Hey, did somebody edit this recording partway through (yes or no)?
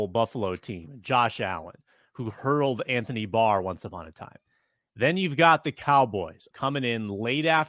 yes